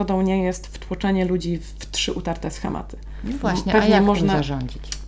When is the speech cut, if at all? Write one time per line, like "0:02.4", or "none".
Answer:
none